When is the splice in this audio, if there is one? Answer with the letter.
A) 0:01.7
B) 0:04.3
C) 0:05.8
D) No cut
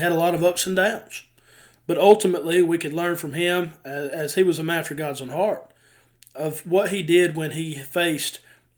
D